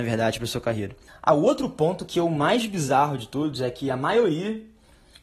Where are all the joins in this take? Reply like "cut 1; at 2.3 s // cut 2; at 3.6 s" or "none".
cut 1; at 1.1 s

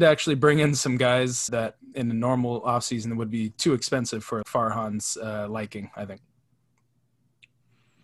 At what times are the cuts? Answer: cut 1; at 1.5 s // cut 2; at 4.4 s

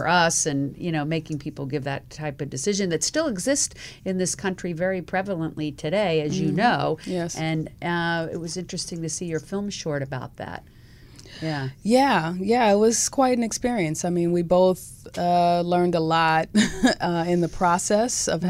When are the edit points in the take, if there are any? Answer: none

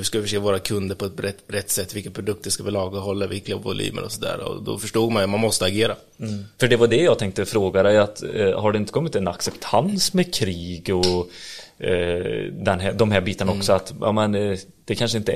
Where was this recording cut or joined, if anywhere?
none

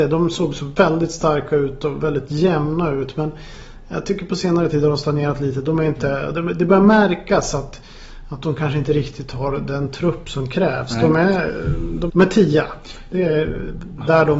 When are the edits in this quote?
cut 1; at 12.1 s

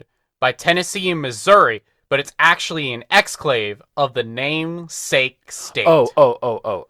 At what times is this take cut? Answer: none

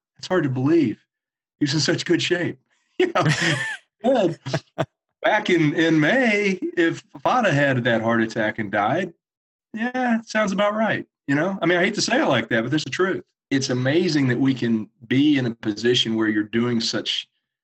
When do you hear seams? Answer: cut 1; at 12.8 s

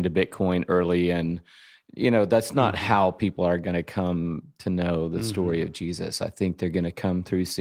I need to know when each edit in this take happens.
none

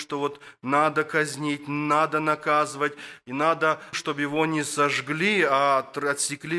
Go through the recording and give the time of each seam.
cut 1; at 3.9 s

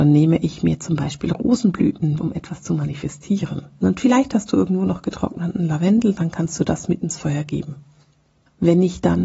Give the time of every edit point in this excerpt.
cut 1; at 2.2 s // cut 2; at 3.8 s

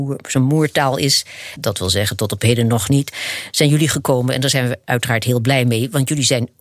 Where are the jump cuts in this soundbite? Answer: cut 1; at 1.6 s

